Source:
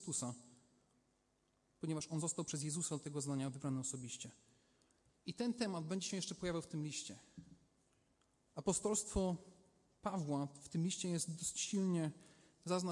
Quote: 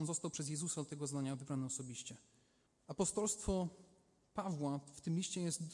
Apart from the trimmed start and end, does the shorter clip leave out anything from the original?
yes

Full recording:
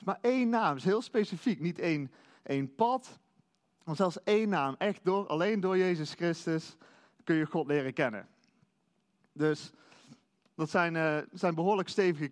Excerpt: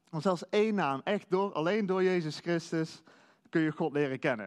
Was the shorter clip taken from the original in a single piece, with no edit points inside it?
yes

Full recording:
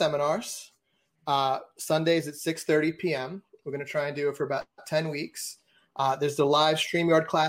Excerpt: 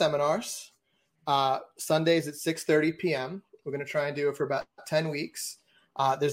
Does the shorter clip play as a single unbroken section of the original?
yes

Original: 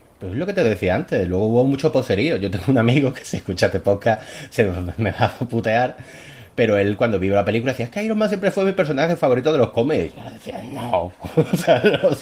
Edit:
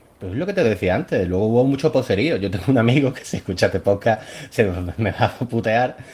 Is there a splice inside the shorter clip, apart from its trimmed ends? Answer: no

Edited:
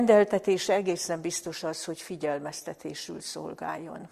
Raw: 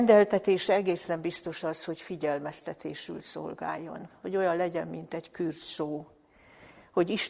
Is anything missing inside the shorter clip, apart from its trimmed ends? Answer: no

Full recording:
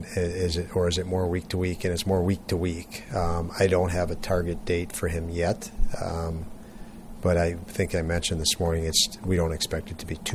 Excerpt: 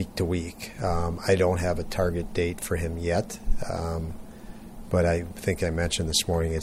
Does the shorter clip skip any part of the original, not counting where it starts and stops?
no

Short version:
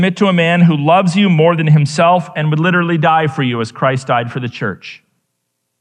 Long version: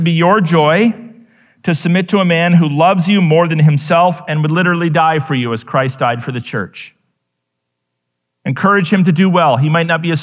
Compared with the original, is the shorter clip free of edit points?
yes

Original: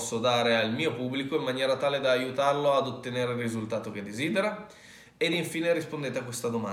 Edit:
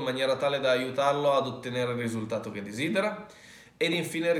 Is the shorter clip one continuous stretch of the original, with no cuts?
yes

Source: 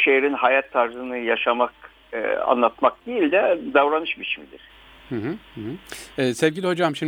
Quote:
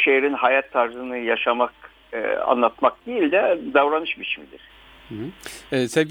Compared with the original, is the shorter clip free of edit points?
no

